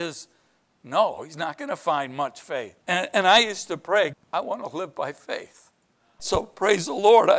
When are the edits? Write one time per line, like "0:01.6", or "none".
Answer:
0:02.8
0:04.1
0:06.2